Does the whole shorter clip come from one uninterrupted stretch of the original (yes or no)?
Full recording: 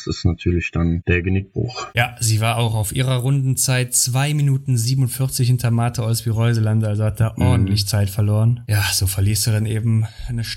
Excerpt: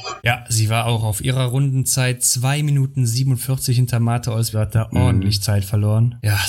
no